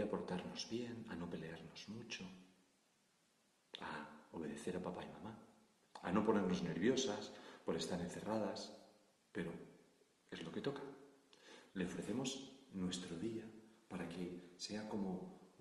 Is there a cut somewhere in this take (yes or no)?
yes